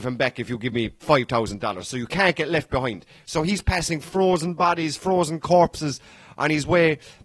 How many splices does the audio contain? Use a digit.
0